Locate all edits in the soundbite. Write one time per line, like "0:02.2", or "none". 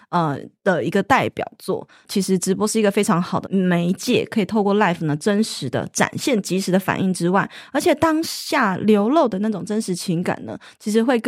0:03.4